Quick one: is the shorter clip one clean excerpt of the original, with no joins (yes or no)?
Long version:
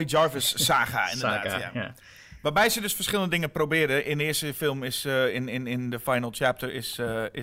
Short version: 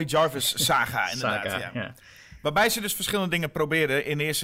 yes